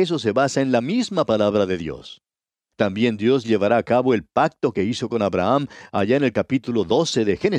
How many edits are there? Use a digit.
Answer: 1